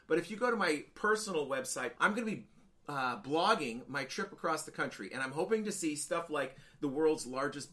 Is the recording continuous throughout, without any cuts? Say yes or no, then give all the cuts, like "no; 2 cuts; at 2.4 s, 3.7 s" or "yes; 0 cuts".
no; 1 cut; at 2.0 s